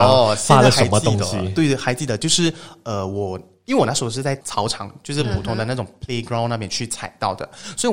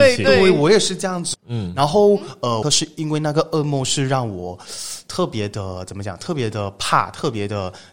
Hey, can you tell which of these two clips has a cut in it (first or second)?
second